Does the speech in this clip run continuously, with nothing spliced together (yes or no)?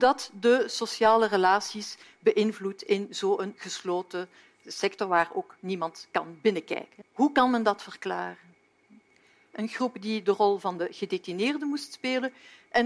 no